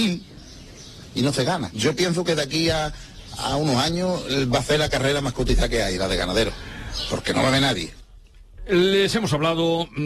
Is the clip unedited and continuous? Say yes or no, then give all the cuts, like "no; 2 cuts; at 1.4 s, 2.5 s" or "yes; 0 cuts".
yes; 0 cuts